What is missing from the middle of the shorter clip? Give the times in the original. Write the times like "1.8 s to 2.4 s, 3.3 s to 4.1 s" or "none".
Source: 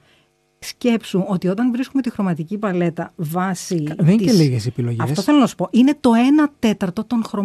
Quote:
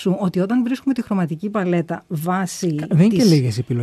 none